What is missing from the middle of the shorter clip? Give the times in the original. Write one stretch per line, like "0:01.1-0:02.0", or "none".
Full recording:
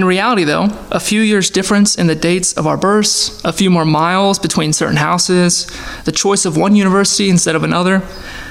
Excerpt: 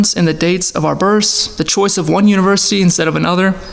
0:03.4-0:06.0